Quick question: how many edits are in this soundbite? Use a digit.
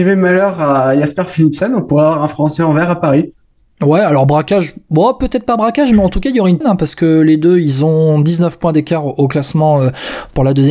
1